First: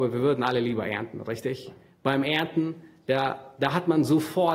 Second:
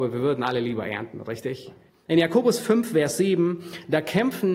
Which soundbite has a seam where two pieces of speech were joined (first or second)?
second